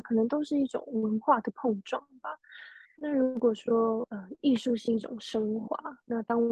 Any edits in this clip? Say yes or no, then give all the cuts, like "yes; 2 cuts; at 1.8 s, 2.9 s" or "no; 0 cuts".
yes; 1 cut; at 2.8 s